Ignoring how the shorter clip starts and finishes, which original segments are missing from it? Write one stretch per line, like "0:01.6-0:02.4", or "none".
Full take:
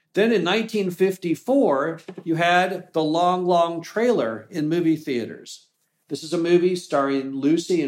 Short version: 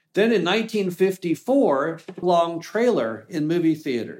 0:02.2-0:03.4